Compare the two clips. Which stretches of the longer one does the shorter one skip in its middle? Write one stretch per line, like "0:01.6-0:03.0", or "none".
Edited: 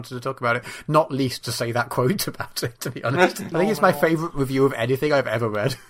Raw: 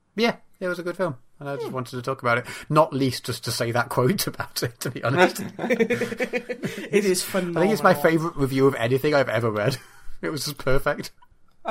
0:03.2-0:03.4
0:05.5-0:07.5